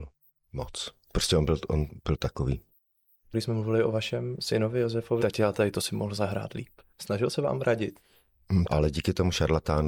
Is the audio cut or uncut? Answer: cut